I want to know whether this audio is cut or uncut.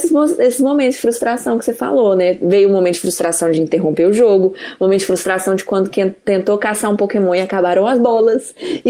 uncut